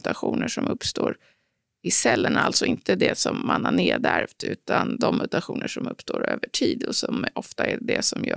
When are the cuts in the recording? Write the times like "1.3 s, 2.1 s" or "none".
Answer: none